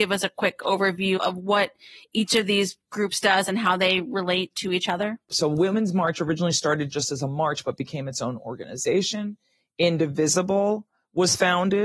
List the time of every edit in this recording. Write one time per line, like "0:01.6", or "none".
0:01.2